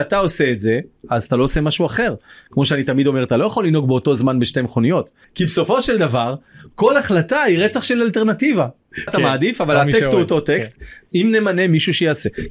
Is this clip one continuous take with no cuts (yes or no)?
no